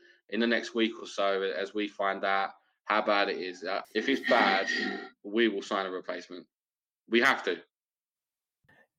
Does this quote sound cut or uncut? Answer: uncut